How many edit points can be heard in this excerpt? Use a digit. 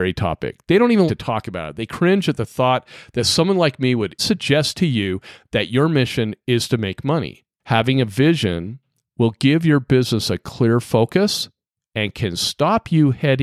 3